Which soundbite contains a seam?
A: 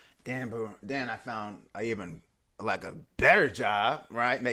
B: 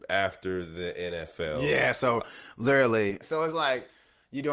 B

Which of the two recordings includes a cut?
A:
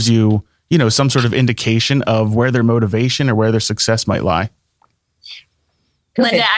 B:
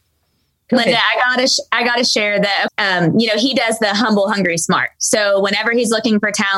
B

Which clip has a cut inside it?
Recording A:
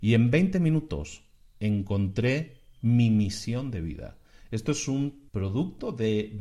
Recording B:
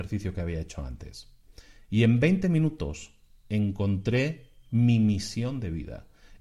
A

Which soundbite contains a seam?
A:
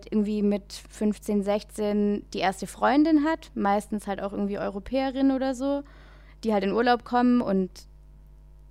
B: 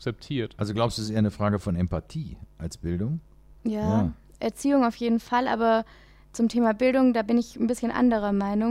B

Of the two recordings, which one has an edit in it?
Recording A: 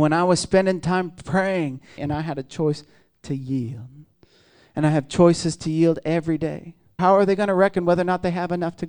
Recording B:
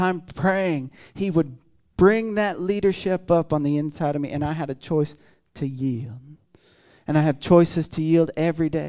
A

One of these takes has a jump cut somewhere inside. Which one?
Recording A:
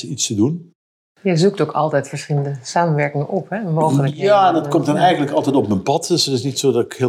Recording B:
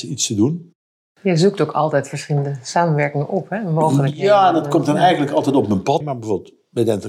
B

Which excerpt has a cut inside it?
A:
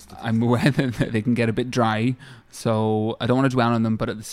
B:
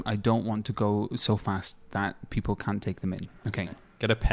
B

